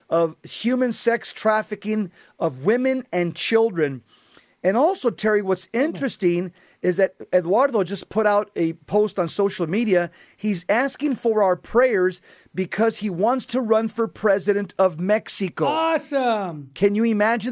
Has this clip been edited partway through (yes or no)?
no